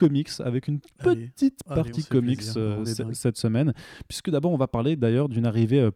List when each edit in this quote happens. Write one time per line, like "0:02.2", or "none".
none

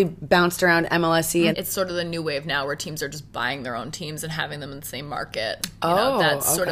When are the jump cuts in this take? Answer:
0:01.5

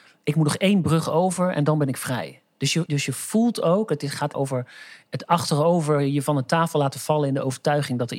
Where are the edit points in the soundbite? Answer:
0:02.9
0:04.3

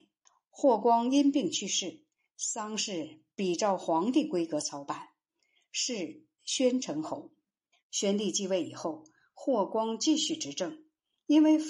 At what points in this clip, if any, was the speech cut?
0:07.8

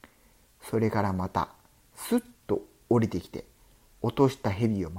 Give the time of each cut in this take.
none

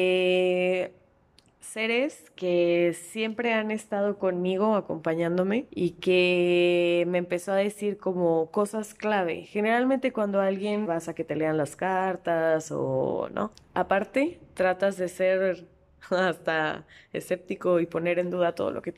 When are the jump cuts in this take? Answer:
0:10.9
0:13.5

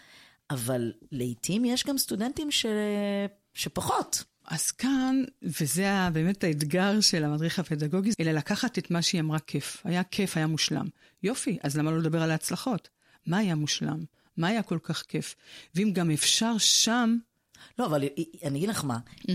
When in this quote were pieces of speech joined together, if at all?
0:04.4
0:08.1

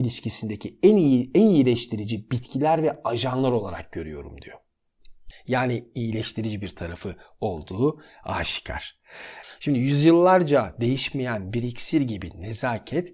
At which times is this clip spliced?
0:05.3
0:09.4

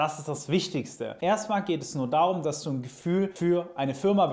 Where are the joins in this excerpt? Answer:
0:01.2

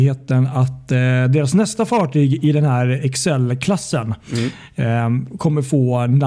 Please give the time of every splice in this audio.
none

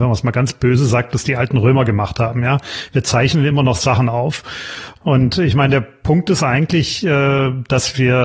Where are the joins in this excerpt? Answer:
0:05.0

